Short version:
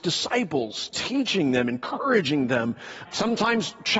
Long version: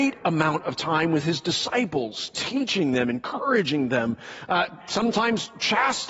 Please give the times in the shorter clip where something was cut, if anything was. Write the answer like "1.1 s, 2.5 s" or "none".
3.0 s